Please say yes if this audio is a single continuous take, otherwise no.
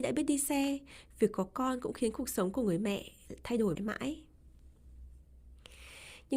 no